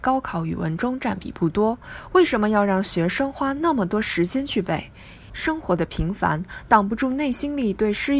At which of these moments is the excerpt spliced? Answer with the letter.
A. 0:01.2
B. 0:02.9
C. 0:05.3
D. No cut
C